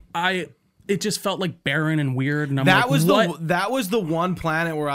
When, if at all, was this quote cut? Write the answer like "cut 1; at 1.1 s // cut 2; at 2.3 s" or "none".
none